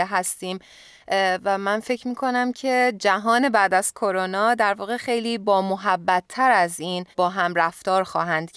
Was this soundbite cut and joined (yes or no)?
yes